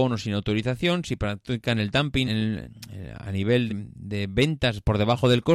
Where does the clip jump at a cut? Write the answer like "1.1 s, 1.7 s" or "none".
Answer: 2.3 s, 3.7 s